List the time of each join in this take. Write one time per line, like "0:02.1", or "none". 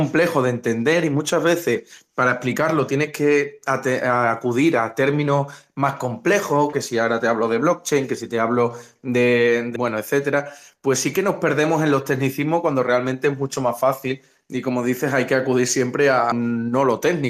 0:06.7
0:09.8
0:16.3